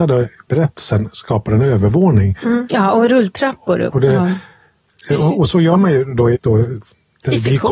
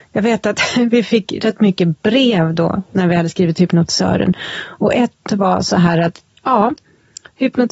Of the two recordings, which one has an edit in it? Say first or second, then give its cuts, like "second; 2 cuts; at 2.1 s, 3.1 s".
first; 2 cuts; at 3.9 s, 6.3 s